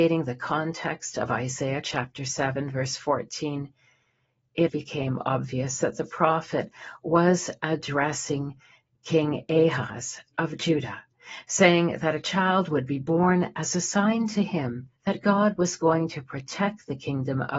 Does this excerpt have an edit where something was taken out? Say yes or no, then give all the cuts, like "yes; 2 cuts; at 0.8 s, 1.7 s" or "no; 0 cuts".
yes; 2 cuts; at 4.7 s, 15.0 s